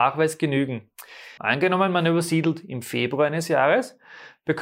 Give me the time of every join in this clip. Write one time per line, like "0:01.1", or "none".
0:01.4